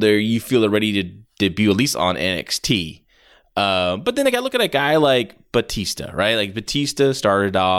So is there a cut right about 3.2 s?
no; 0 cuts

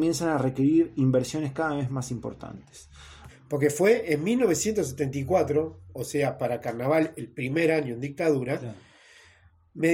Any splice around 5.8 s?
no; 1 cut; at 3.3 s

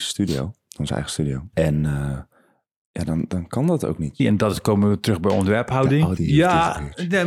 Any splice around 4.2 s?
yes; 3 cuts; at 1.5 s, 4.2 s, 6.2 s

